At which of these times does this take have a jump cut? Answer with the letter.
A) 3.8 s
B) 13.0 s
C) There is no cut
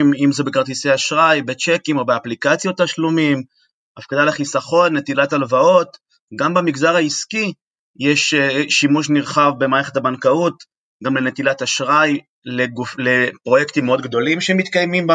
C